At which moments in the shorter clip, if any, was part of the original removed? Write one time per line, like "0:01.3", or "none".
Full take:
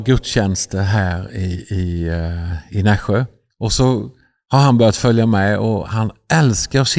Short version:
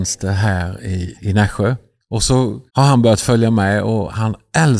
0:01.1
0:02.7